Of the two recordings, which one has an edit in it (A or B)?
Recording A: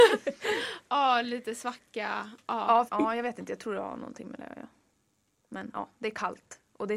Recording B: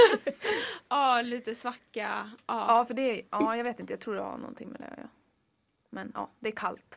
A